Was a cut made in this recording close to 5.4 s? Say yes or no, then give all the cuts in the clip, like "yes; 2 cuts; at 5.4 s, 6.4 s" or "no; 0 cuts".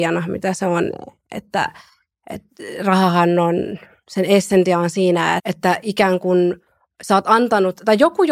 yes; 1 cut; at 5.4 s